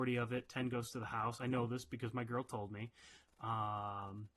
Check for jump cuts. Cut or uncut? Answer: uncut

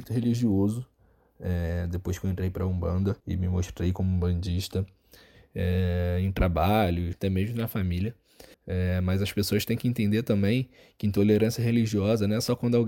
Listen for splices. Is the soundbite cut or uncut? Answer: cut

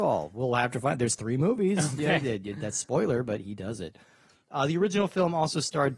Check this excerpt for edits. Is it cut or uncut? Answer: uncut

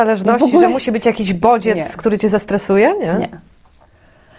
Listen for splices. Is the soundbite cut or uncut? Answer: uncut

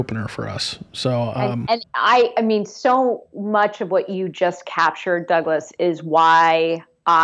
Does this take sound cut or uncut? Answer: cut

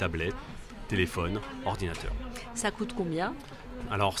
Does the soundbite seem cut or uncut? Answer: uncut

